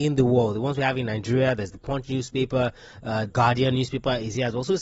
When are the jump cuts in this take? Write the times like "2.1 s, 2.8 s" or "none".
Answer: 3.3 s